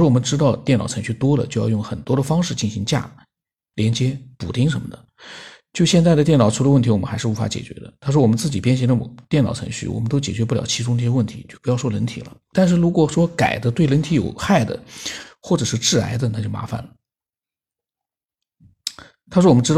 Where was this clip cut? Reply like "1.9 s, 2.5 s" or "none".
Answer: 3.7 s, 12.5 s